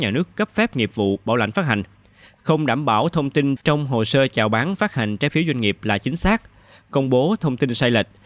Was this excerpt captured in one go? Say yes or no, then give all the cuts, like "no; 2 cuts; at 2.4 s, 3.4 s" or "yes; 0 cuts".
yes; 0 cuts